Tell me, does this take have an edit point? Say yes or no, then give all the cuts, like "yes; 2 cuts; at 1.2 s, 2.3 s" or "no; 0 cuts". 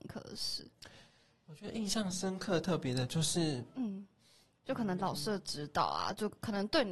no; 0 cuts